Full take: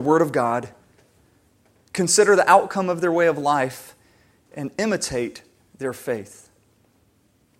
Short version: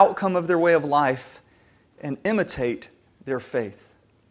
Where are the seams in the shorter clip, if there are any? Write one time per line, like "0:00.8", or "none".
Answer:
none